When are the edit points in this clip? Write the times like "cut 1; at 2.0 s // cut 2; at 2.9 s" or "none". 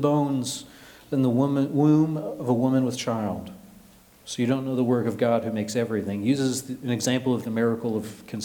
none